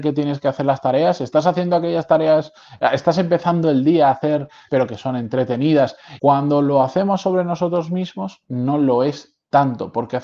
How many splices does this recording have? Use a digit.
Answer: 2